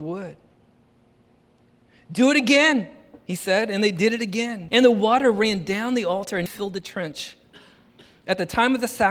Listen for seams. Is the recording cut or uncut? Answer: cut